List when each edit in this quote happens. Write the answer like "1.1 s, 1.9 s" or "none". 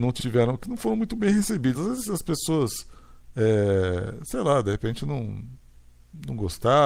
none